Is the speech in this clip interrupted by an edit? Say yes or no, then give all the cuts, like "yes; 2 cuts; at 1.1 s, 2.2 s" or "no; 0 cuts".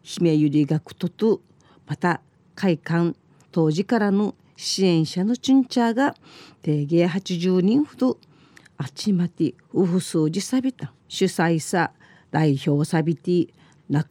yes; 1 cut; at 11.0 s